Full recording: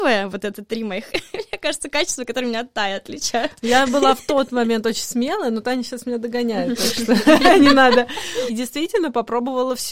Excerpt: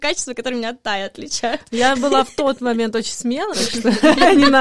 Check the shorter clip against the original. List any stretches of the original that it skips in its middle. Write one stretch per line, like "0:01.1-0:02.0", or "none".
0:05.4-0:06.8